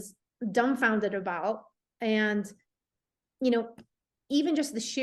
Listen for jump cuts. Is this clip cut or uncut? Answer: uncut